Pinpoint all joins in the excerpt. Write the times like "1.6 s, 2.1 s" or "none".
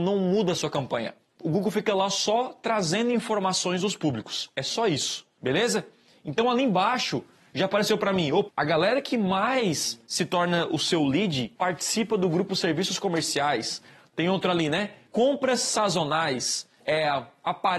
8.5 s